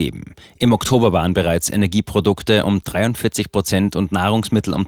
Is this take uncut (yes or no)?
yes